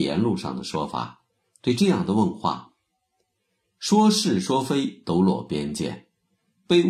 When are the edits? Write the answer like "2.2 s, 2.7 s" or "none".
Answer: none